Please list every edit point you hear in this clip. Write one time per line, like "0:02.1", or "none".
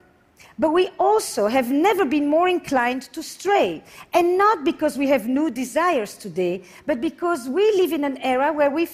none